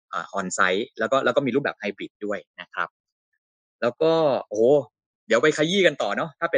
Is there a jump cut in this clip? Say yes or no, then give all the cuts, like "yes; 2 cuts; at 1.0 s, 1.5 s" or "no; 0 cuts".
no; 0 cuts